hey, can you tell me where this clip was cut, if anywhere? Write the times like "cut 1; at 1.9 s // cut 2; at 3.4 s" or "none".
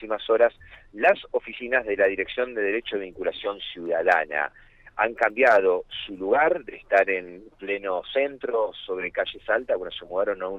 none